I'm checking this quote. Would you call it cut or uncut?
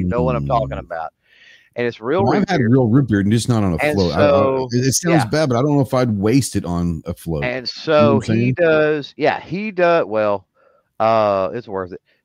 uncut